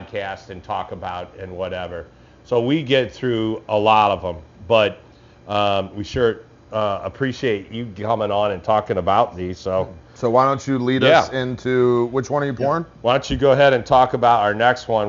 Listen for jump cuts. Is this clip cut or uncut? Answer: uncut